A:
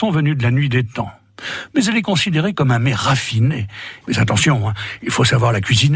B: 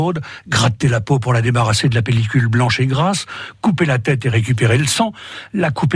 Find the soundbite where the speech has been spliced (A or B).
A